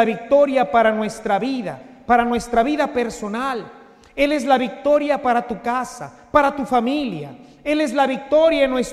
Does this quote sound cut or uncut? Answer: uncut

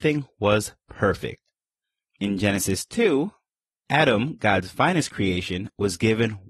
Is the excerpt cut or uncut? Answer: uncut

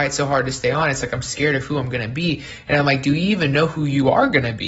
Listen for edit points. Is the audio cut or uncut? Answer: uncut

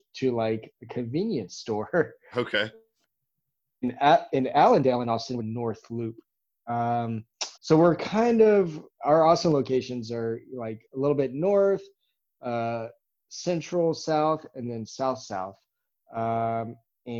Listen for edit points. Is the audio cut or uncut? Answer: cut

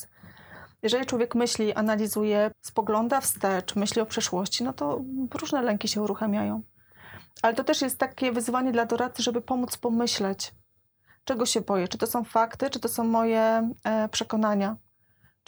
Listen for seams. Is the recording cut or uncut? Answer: cut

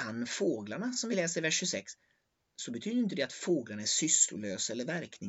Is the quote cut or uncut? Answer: uncut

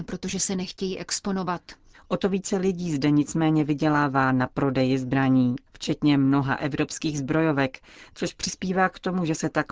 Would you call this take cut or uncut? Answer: cut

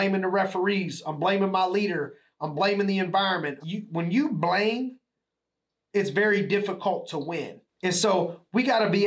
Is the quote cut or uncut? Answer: cut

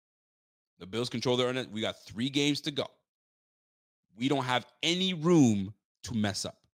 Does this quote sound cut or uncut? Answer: uncut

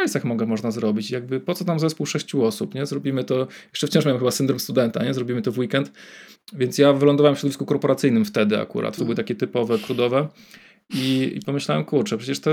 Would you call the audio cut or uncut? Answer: cut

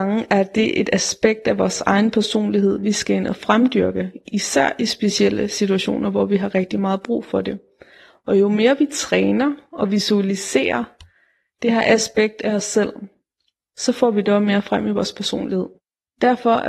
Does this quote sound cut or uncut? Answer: uncut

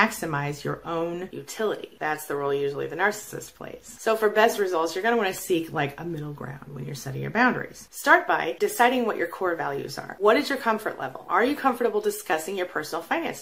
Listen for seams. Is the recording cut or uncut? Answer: cut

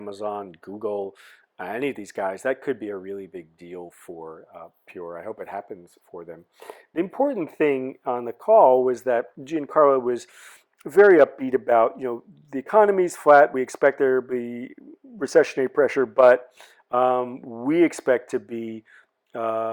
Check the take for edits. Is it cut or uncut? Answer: uncut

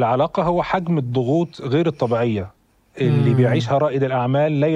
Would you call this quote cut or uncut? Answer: uncut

